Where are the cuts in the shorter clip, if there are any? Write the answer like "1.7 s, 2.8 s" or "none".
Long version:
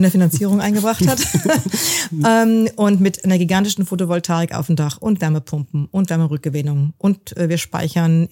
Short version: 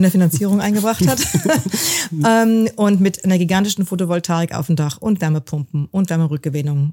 none

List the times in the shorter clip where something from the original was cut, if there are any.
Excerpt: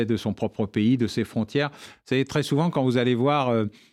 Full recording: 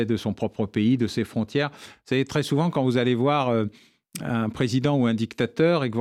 none

